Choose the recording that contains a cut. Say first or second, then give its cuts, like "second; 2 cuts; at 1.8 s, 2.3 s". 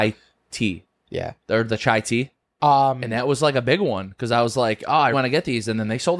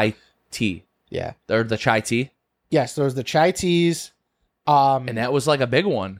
first; 2 cuts; at 2.4 s, 5.1 s